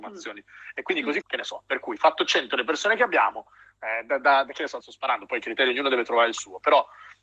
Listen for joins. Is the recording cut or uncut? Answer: cut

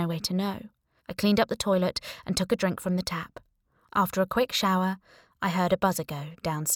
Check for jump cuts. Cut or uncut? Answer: cut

